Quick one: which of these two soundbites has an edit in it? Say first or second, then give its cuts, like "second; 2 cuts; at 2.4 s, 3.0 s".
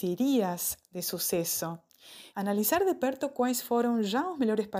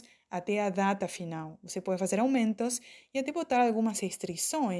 first; 1 cut; at 2.3 s